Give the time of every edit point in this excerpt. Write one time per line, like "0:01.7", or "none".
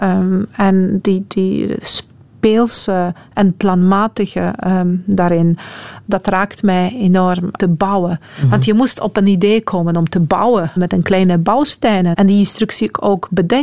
0:07.6
0:10.8
0:12.1